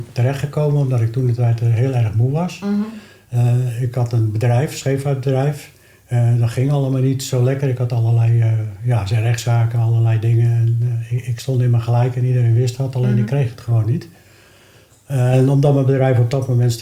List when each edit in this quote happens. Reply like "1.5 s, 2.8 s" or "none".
none